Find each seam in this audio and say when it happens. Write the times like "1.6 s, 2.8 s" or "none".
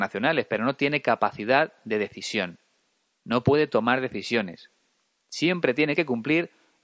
none